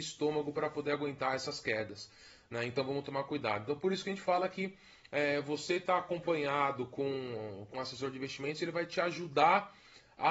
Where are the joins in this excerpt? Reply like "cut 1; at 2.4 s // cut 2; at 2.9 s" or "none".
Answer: cut 1; at 7.7 s